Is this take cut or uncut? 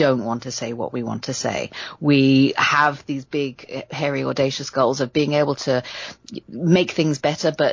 uncut